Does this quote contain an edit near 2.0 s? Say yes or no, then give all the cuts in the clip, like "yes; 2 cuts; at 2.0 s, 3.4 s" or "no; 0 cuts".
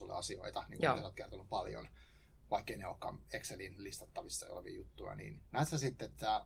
no; 1 cut; at 5.5 s